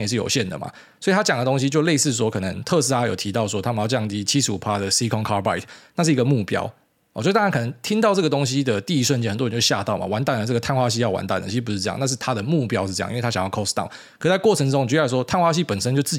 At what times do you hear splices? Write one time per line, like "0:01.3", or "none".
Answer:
none